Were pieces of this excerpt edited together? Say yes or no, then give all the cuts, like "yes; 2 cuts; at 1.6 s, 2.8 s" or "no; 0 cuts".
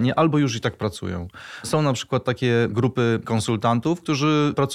no; 0 cuts